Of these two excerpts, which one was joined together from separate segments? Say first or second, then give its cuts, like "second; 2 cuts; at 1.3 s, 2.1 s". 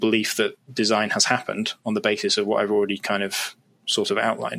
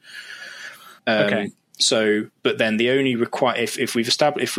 second; 1 cut; at 1.0 s